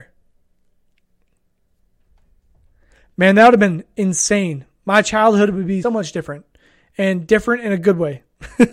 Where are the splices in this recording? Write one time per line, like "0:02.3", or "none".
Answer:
0:05.8